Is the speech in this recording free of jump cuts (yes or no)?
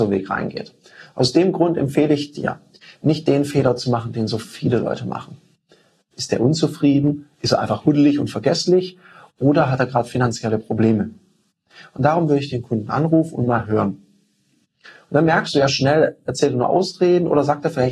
no